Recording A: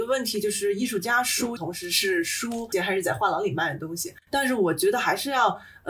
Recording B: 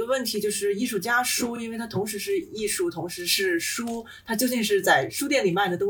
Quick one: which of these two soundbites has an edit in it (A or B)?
A